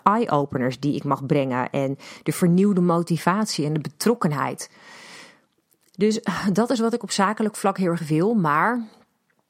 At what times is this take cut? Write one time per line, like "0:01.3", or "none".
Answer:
none

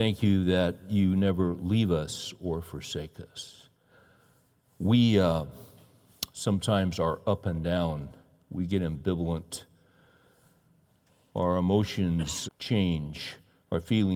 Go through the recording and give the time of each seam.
0:12.5

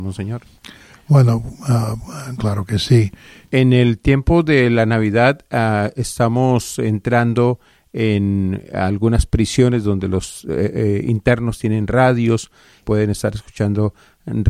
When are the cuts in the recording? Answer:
0:03.4
0:12.8

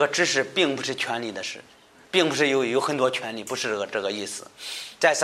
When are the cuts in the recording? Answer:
none

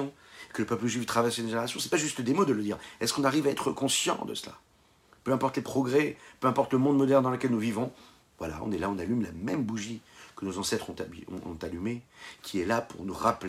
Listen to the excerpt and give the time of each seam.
none

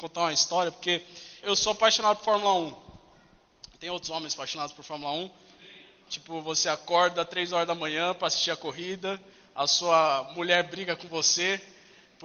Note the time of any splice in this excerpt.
0:01.4

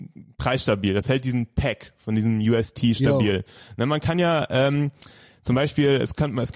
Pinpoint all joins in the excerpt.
none

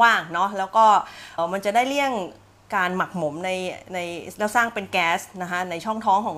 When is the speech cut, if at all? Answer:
0:01.4

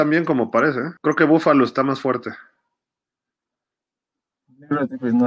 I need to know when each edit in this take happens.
0:01.0

